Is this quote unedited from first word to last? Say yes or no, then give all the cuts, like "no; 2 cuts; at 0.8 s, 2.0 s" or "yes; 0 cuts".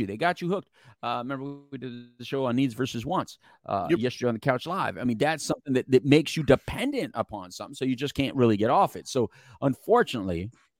yes; 0 cuts